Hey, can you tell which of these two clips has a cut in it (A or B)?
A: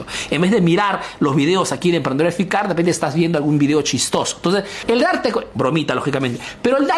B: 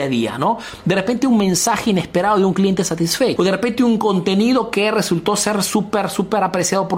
B